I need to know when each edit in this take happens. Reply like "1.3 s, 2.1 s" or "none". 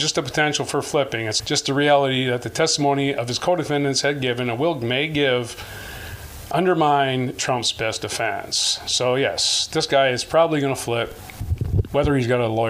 1.4 s